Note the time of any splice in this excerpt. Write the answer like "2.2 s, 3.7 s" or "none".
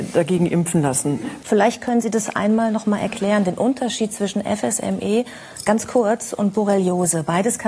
1.4 s